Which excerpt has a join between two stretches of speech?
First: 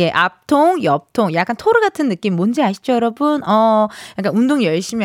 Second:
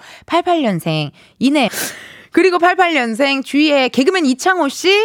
second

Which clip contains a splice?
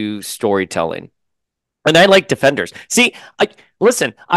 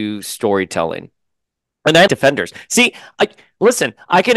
second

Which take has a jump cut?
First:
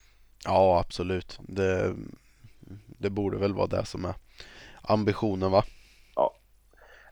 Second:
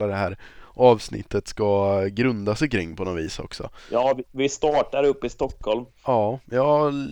second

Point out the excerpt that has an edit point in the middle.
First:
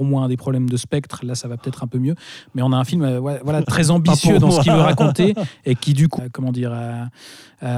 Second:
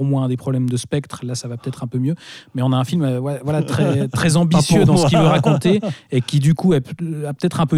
first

